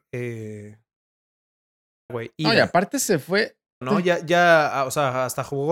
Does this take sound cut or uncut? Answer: cut